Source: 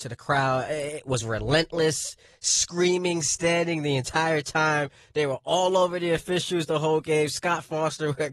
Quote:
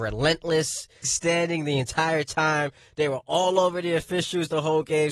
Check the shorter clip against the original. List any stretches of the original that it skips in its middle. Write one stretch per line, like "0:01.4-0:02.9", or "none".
0:02.3-0:03.2

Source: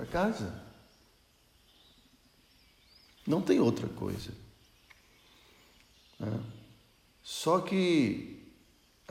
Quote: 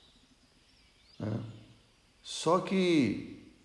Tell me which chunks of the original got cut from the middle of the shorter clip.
0:03.0-0:06.1

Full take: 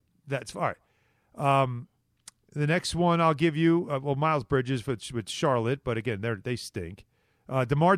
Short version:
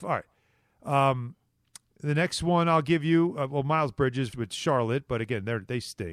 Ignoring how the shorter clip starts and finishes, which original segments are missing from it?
0:04.8-0:05.1

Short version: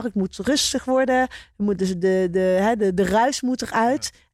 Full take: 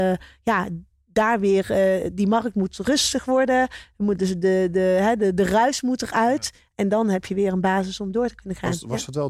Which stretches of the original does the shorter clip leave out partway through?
none

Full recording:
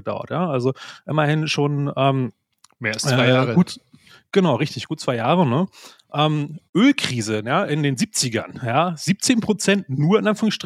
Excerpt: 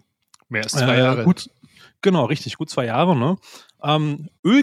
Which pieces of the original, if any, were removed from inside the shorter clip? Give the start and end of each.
none

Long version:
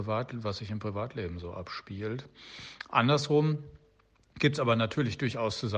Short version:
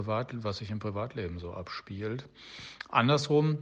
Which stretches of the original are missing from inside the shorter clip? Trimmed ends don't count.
none

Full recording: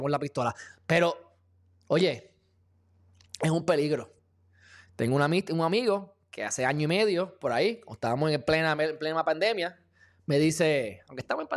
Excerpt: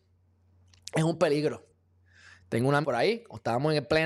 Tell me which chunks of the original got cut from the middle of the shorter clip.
0:05.3-0:07.4

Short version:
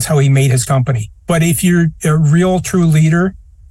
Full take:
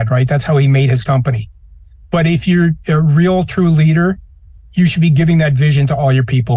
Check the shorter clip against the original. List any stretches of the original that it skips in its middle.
0:01.6-0:02.0

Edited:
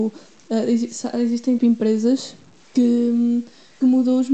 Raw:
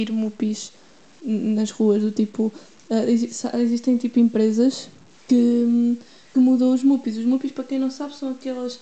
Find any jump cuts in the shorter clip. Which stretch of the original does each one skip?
0:04.0-0:04.1

